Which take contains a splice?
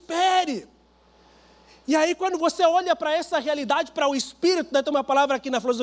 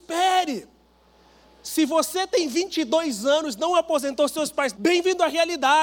second; 2 cuts; at 1.4 s, 4.7 s

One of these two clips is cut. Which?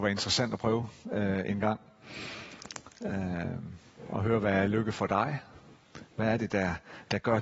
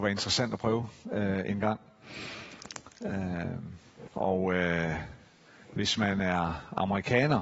second; 1 cut; at 4.1 s

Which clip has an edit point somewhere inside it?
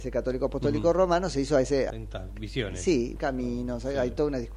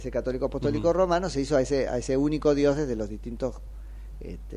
first; 2 cuts; at 1.9 s, 3.2 s

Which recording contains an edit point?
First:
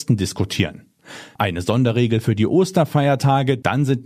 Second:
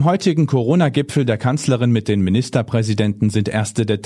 first; 1 cut; at 1.4 s

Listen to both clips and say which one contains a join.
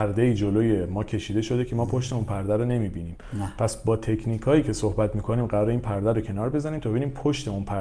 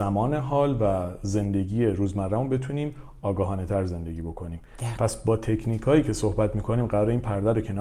second; 1 cut; at 4.9 s

